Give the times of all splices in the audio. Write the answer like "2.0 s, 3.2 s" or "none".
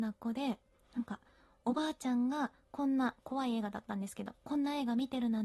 none